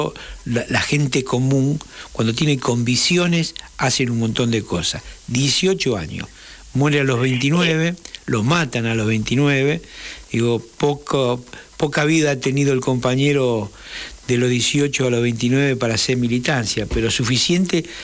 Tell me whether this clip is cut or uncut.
uncut